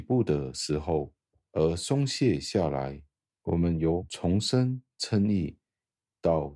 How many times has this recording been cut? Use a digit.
1